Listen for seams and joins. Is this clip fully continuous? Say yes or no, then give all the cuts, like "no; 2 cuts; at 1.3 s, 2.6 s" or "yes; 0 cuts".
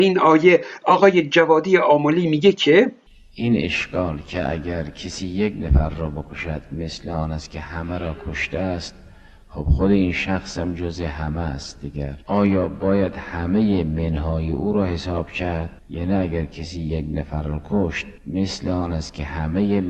no; 3 cuts; at 12.2 s, 15.8 s, 18.2 s